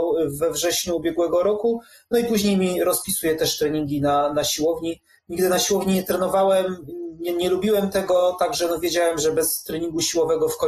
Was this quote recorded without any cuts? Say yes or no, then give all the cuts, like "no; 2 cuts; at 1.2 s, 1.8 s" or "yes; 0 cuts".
yes; 0 cuts